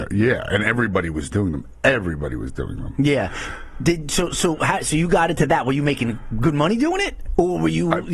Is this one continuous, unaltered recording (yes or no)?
yes